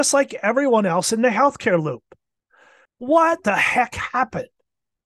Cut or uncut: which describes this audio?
cut